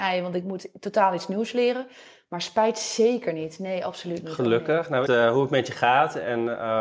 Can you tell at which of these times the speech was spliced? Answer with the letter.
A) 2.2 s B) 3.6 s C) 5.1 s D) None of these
C